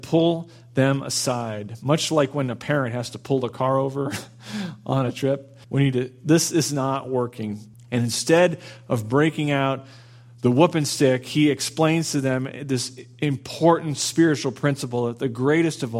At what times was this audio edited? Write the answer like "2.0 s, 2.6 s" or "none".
5.6 s, 7.7 s